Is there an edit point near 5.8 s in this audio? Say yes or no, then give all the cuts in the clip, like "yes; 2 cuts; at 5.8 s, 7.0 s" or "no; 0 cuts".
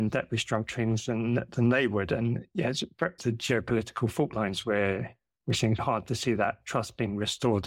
yes; 2 cuts; at 3.2 s, 5.8 s